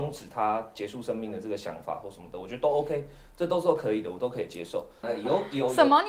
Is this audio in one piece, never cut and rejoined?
no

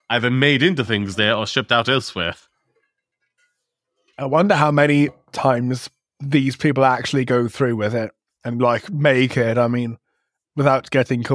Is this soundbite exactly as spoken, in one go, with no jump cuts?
yes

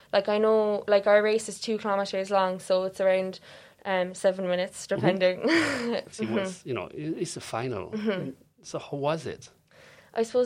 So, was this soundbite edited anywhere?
yes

